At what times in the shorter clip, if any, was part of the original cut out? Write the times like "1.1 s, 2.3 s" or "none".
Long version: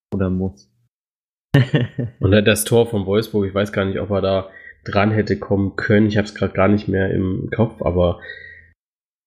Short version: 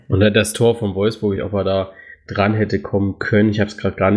1.4 s

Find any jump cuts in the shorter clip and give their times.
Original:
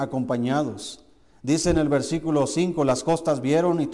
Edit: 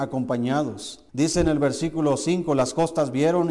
1.1 s

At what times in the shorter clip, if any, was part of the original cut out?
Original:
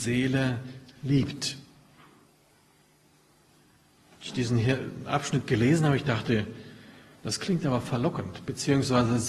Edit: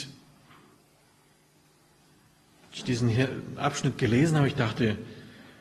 none

